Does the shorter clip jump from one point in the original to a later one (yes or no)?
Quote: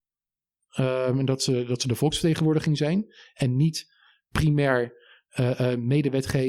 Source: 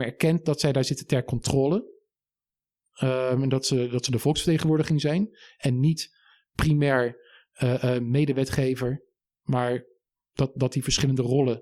no